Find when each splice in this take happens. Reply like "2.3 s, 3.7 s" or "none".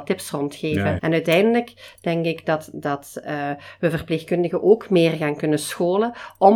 1.0 s